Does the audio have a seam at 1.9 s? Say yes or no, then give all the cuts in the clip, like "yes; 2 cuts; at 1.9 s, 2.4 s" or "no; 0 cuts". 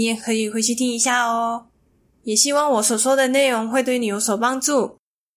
no; 0 cuts